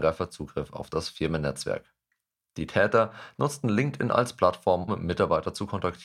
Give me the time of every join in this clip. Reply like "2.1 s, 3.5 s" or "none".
4.9 s